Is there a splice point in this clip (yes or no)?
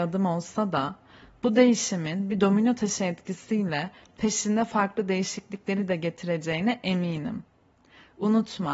no